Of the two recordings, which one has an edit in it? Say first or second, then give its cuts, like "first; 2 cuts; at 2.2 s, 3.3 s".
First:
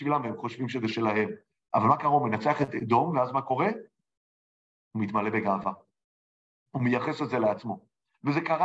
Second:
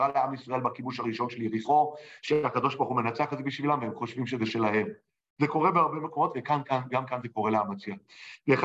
first; 1 cut; at 1.6 s